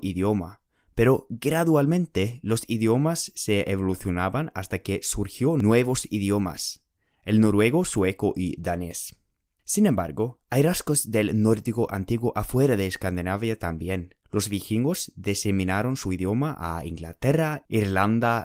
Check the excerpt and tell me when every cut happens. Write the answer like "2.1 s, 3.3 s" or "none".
14.2 s